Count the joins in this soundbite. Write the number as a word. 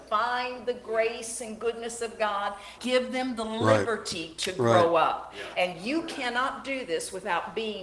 one